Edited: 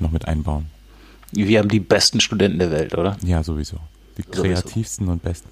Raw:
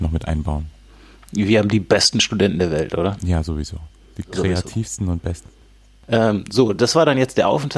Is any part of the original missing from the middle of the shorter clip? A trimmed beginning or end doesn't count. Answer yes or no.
no